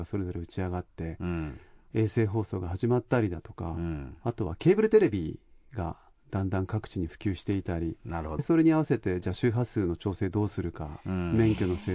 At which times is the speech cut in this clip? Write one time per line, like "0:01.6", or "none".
0:08.4

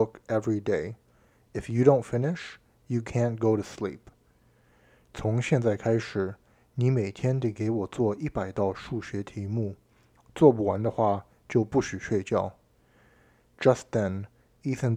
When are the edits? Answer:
none

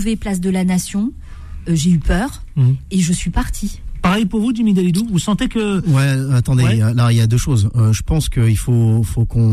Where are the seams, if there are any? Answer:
none

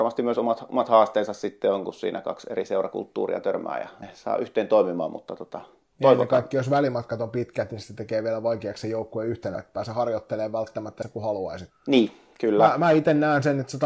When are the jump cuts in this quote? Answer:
0:11.7

